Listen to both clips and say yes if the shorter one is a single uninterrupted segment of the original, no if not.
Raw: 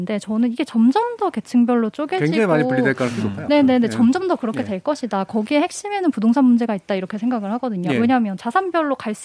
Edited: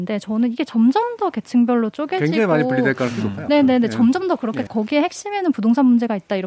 no